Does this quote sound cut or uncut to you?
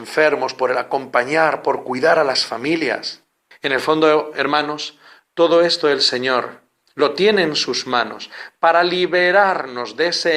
cut